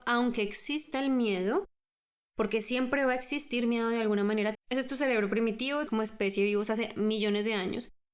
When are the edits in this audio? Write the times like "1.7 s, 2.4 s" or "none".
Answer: 4.5 s, 5.9 s